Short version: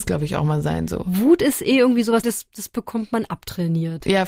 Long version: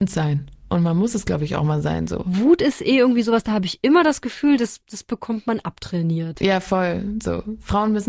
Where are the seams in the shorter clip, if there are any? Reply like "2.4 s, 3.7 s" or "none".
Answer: 2.2 s